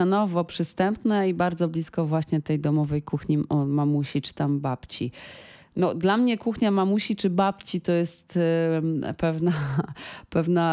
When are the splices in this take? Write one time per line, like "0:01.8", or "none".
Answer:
none